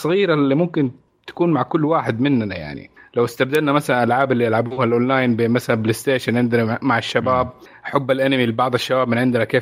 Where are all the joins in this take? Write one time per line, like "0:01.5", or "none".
none